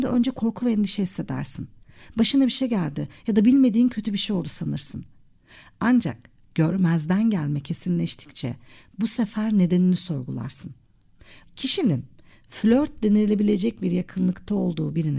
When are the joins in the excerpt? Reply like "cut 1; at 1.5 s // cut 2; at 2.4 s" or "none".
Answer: cut 1; at 11.4 s